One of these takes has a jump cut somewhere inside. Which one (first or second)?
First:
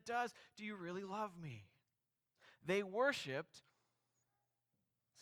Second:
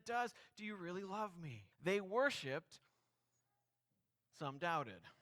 second